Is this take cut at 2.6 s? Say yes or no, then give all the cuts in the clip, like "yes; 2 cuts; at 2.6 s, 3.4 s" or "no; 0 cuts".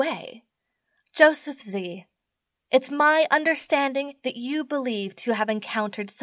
no; 1 cut; at 1.0 s